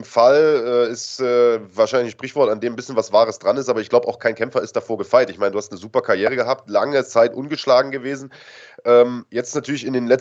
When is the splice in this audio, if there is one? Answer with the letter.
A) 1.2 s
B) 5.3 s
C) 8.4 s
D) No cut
D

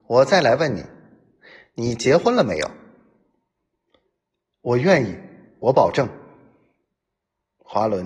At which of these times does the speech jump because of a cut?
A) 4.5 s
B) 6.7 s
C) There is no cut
A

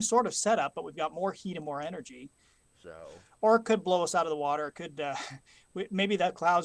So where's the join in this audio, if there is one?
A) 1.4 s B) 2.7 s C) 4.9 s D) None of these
B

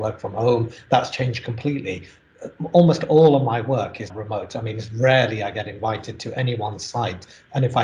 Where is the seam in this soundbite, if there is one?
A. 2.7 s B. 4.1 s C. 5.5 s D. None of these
B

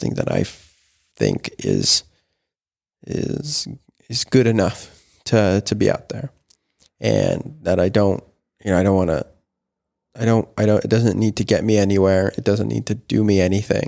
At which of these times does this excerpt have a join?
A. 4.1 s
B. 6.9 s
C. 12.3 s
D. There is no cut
D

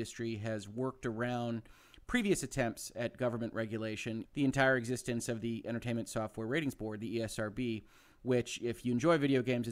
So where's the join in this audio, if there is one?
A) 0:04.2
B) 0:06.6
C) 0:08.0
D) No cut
A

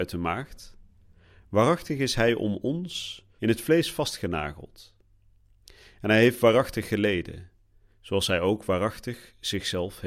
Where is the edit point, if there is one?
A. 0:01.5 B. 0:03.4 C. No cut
B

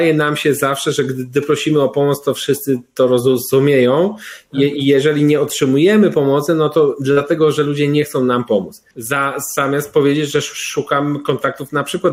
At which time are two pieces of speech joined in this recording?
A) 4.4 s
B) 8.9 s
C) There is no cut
B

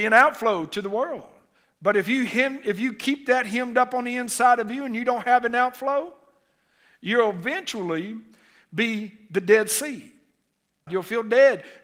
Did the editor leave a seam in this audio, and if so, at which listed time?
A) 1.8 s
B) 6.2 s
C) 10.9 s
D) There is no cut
C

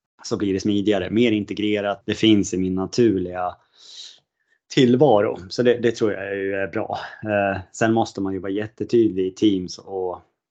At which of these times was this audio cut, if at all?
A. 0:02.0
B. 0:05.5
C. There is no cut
A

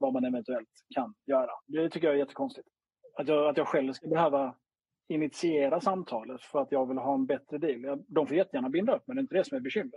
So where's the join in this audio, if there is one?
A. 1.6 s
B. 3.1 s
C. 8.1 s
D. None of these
A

